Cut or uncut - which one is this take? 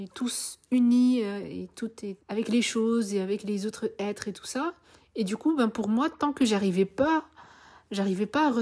cut